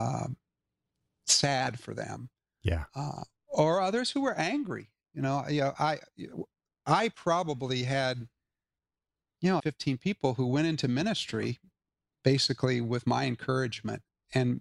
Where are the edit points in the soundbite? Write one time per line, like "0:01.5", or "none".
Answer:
0:09.6